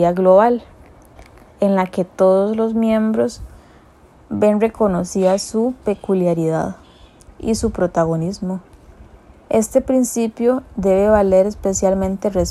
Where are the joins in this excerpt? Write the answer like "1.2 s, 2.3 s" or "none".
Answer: none